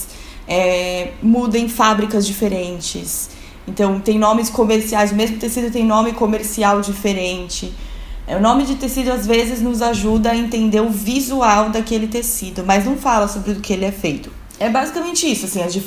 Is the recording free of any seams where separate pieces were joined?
no; 1 cut; at 14.5 s

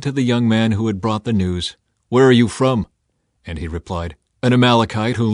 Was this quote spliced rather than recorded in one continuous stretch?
yes; 1 cut; at 4.3 s

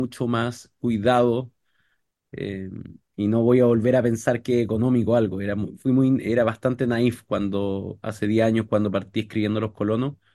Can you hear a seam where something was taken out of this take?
no; 0 cuts

